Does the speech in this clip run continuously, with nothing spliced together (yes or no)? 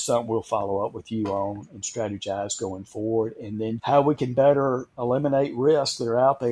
no